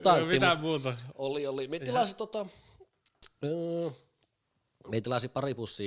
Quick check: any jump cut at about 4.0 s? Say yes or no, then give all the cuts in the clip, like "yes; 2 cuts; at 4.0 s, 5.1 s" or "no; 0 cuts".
no; 1 cut; at 1.1 s